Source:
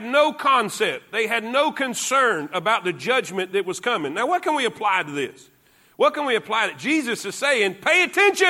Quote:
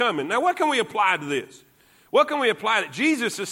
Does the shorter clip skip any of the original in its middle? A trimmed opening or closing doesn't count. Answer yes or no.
no